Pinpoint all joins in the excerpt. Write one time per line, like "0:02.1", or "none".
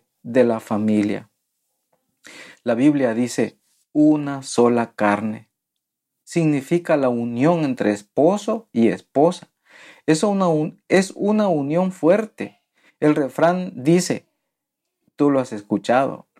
none